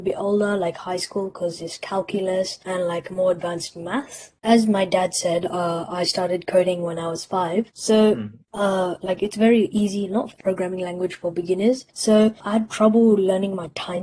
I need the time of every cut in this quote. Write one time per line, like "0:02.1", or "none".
0:07.7